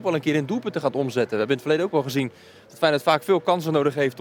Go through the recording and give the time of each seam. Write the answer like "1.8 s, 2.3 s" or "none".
none